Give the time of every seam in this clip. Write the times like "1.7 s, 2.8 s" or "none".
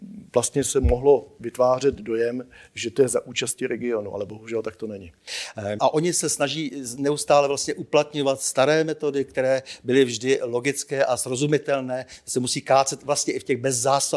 5.8 s

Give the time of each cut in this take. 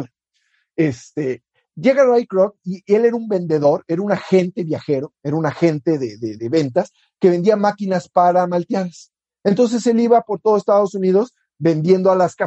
6.4 s

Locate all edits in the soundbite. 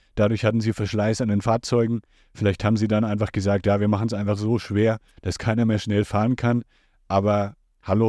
none

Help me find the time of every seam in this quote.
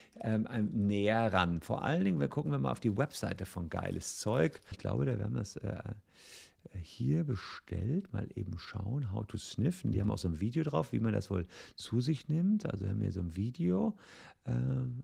4.7 s

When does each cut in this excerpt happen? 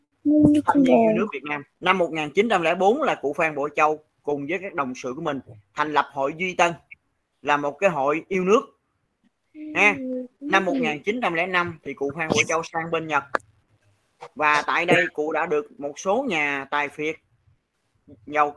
1.8 s

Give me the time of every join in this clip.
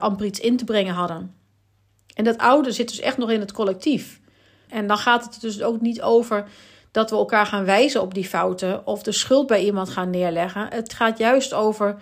4.7 s

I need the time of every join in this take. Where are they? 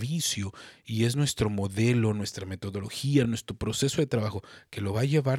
none

